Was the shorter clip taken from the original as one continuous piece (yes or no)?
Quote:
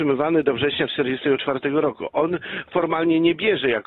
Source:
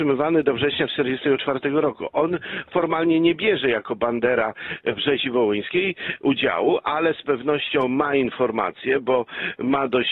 yes